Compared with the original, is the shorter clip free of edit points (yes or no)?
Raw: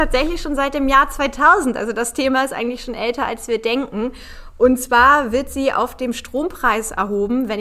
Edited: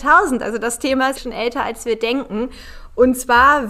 no